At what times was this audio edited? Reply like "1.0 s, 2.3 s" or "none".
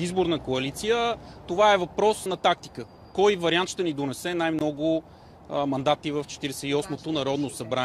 2.3 s